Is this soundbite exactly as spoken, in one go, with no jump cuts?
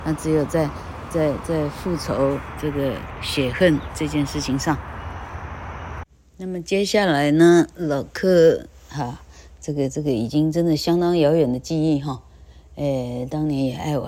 yes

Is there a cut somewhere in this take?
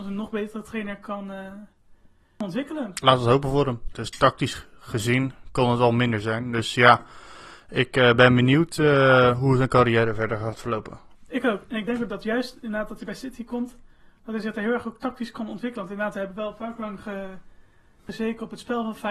yes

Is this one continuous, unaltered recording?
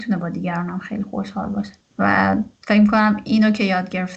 no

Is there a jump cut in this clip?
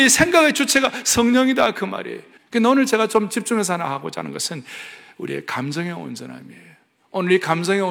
yes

